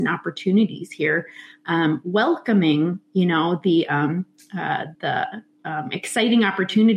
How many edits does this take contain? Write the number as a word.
one